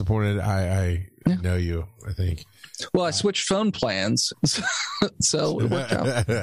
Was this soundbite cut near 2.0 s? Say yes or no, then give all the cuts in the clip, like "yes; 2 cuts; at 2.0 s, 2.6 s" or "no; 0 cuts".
no; 1 cut; at 4.3 s